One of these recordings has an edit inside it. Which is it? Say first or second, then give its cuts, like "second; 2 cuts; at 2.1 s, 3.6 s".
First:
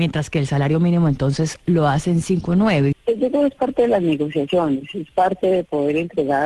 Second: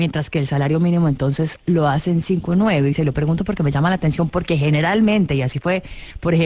first; 1 cut; at 2.9 s